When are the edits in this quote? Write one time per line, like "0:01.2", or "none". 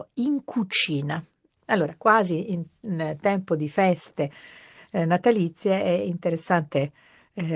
0:01.6